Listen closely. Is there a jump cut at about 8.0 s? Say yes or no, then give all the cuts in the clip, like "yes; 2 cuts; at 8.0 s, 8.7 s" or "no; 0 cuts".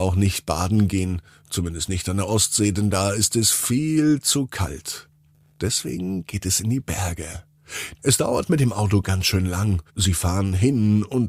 yes; 2 cuts; at 8.0 s, 9.9 s